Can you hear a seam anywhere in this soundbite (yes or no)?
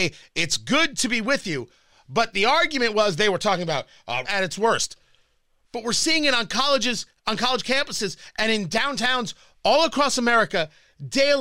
yes